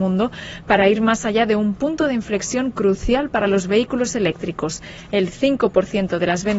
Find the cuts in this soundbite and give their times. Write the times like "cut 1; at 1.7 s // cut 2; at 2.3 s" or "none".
none